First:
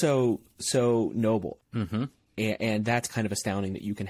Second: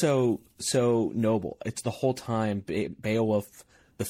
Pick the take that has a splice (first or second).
first